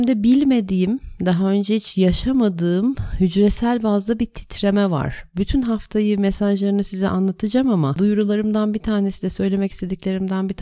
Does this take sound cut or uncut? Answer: uncut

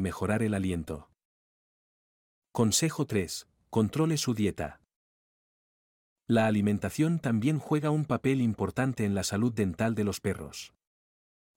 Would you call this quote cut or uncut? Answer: uncut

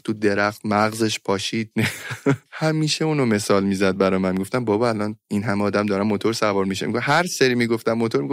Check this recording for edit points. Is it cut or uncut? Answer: cut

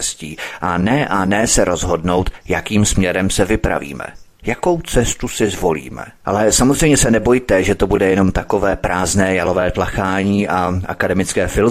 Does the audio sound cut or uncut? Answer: cut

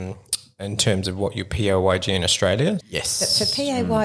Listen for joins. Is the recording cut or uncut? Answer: cut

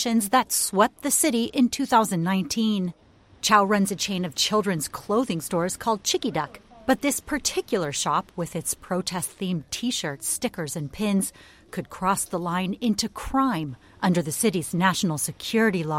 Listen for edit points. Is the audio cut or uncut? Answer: uncut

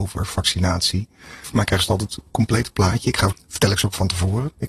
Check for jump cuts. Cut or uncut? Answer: cut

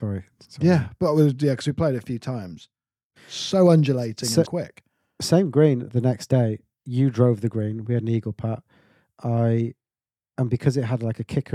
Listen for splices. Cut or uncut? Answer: cut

